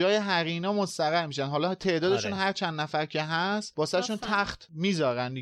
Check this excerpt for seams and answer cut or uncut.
uncut